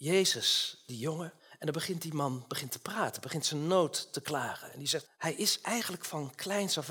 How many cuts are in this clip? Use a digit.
2